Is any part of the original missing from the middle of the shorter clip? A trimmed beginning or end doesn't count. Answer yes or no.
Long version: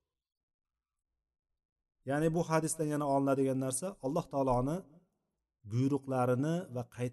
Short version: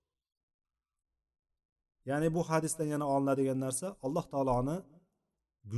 no